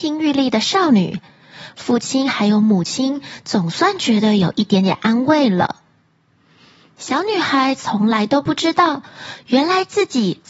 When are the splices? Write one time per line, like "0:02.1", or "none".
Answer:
none